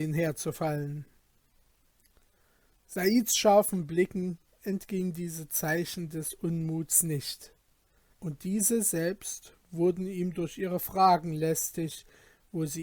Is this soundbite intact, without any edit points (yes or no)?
no